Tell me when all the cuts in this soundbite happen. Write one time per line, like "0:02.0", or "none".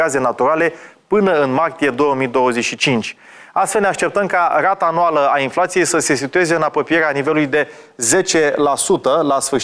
none

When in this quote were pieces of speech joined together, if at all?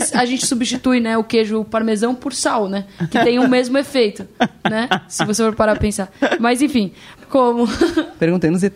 0:07.1

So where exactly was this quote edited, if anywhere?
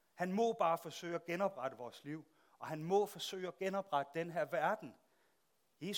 none

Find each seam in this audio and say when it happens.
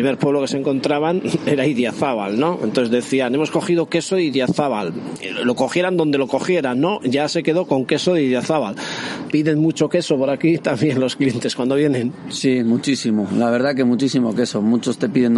0:09.3

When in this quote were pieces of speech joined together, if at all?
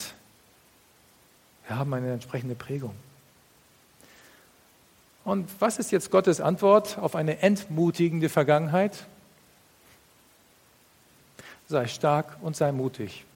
none

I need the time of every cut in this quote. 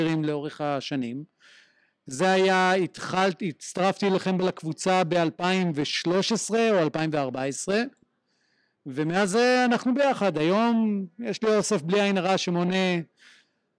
none

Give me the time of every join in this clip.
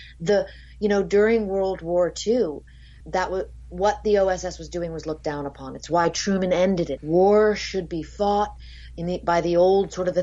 0:03.0
0:07.0

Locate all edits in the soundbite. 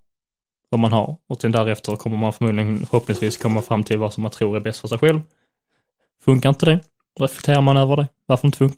none

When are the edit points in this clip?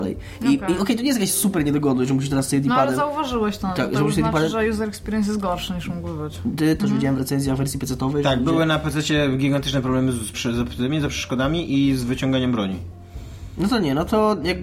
0:06.8
0:10.3

